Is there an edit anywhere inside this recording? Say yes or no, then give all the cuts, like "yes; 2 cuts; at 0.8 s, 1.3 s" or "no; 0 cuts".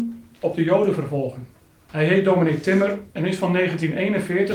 yes; 2 cuts; at 1.9 s, 3.1 s